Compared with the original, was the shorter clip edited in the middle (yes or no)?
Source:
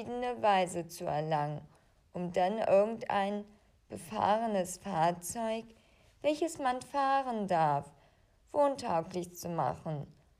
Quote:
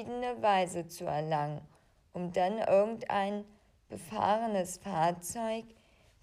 no